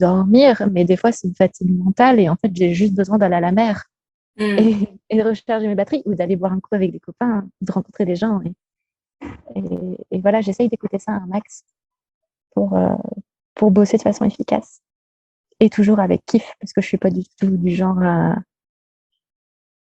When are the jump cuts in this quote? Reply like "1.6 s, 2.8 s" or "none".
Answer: none